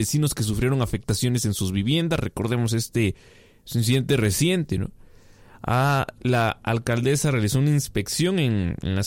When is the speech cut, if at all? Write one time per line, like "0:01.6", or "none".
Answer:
0:06.2